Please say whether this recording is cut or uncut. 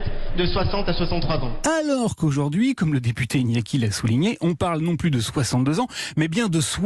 uncut